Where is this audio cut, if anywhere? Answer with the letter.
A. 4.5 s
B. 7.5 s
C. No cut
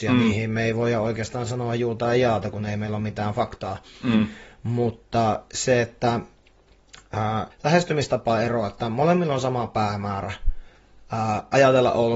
B